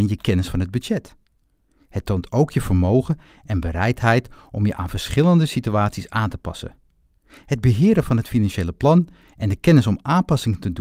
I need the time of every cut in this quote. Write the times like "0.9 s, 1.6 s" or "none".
7.2 s